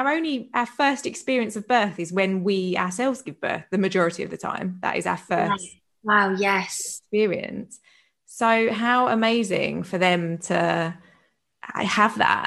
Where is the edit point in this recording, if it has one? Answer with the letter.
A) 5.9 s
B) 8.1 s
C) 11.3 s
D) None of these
D